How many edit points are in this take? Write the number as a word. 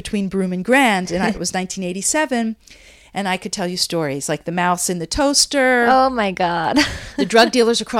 one